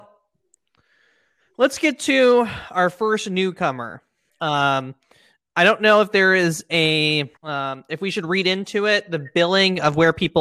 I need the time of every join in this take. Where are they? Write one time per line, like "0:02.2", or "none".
0:04.3
0:07.4